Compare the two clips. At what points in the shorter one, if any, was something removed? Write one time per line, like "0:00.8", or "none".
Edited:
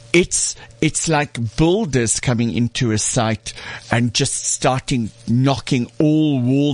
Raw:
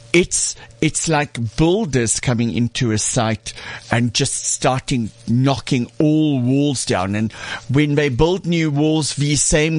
none